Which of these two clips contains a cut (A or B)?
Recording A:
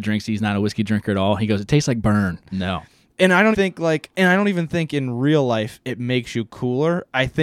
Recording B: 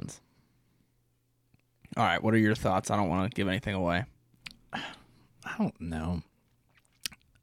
A